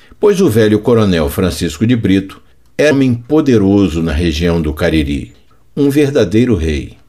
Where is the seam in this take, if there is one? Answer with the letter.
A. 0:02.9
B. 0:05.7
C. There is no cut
A